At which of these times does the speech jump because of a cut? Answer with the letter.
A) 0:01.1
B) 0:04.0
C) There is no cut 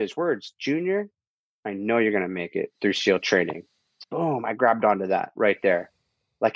B